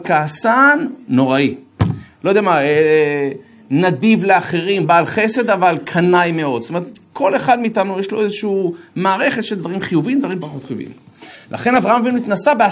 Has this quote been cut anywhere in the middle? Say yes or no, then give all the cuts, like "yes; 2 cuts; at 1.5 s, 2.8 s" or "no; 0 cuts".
no; 0 cuts